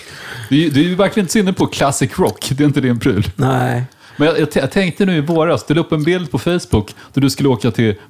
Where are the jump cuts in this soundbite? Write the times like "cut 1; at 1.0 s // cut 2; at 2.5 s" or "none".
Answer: none